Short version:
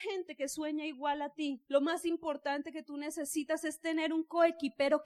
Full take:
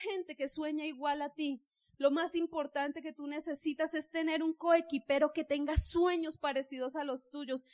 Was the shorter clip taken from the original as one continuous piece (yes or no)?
no